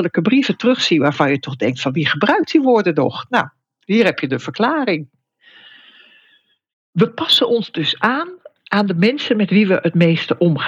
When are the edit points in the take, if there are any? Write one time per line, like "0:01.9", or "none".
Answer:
none

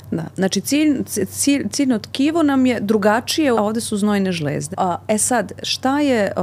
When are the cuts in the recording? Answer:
0:03.5
0:04.7

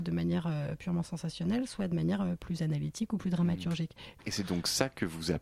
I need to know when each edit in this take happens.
0:04.2

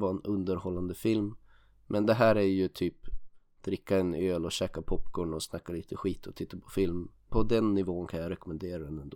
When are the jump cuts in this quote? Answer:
0:07.3

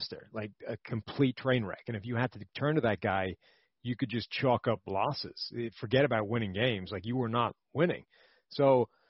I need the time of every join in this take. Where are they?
none

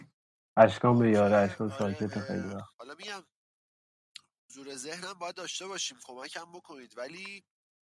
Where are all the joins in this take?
0:02.7

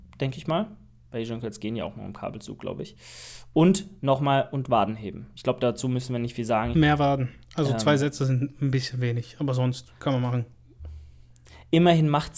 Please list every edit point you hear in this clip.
0:06.7
0:10.0

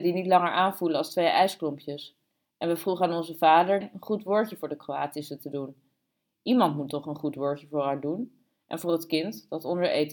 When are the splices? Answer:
0:03.8

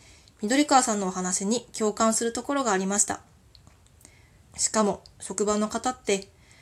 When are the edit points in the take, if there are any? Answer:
0:04.5

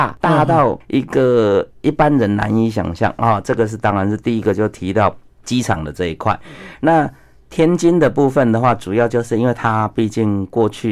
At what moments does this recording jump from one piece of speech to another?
none

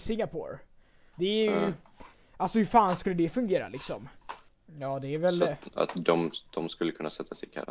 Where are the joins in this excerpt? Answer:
0:01.1
0:04.5

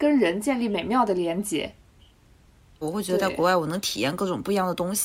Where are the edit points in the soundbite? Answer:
0:02.8

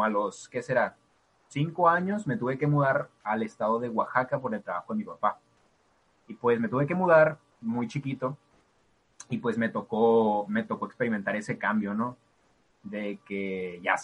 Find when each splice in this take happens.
none

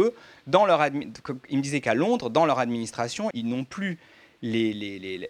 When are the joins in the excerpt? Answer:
0:03.3

